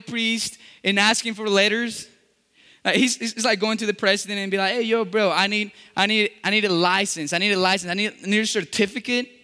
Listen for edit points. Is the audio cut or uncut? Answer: uncut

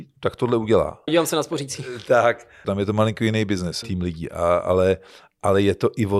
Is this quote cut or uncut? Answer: cut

